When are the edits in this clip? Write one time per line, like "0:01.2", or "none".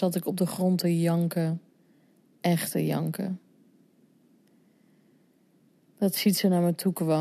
none